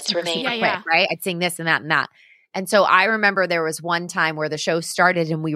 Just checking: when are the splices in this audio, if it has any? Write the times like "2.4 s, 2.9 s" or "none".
none